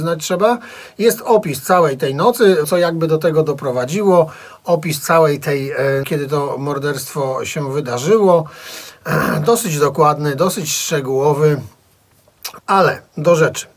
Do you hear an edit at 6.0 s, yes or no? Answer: yes